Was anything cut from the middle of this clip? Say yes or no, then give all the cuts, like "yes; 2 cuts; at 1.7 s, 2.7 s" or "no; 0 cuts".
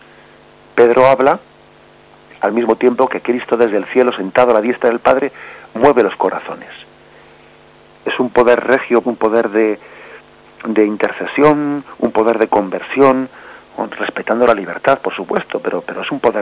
yes; 1 cut; at 9.0 s